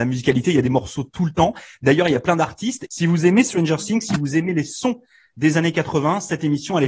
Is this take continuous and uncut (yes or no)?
no